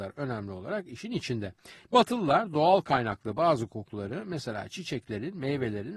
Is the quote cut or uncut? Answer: cut